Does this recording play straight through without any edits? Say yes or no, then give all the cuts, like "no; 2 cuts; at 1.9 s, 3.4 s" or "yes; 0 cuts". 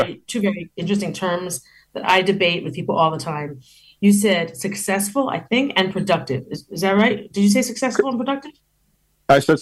yes; 0 cuts